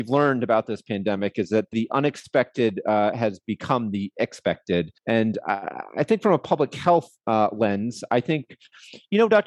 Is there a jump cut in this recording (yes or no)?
yes